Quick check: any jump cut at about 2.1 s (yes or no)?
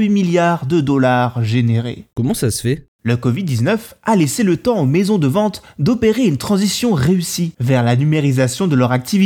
yes